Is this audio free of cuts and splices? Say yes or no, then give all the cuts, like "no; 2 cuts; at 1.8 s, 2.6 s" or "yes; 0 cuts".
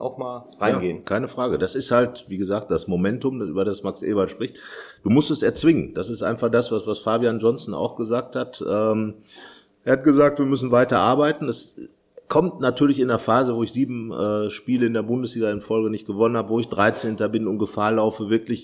yes; 0 cuts